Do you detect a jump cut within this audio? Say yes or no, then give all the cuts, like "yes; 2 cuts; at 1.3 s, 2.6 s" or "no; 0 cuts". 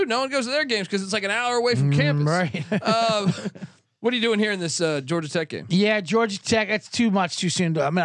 no; 0 cuts